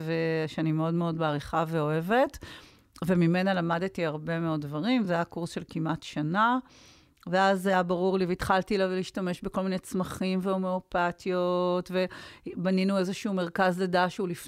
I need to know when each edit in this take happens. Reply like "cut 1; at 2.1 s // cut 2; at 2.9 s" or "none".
none